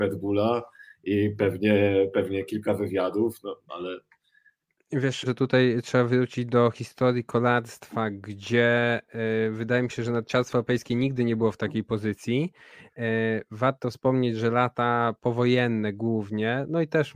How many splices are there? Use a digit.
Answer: 2